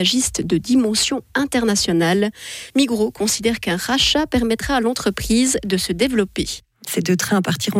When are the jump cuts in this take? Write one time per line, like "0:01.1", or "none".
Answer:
0:06.8